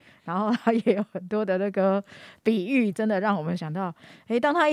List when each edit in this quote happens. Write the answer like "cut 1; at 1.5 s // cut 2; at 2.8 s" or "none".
cut 1; at 2.9 s